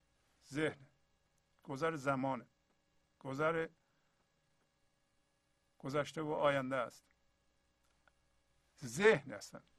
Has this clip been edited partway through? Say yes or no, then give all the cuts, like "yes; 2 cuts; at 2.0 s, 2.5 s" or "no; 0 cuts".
no; 0 cuts